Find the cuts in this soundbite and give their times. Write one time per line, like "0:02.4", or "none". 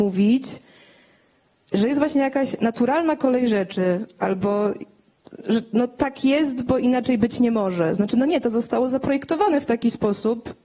0:05.4